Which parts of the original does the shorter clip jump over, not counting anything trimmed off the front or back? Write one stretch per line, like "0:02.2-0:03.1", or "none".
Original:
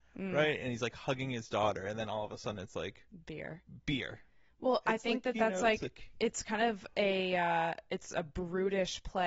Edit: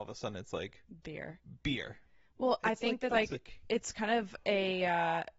0:05.3-0:05.6